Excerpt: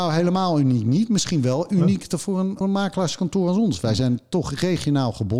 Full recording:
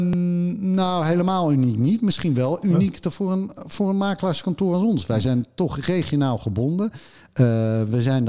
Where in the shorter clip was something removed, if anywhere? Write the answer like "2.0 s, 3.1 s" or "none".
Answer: 2.6 s